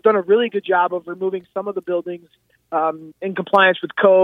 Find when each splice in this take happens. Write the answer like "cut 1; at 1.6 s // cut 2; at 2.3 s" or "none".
cut 1; at 3.1 s